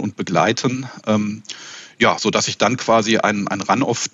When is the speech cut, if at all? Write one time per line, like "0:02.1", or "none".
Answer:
none